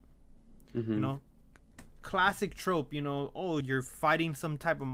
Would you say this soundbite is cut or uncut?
cut